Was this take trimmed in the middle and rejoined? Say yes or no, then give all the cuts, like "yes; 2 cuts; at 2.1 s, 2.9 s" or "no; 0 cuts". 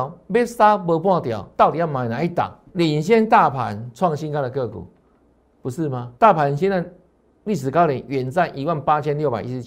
yes; 2 cuts; at 2.7 s, 6.2 s